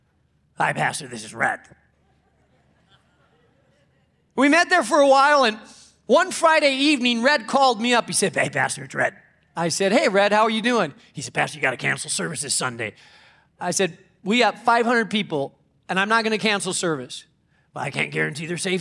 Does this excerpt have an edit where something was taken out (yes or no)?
yes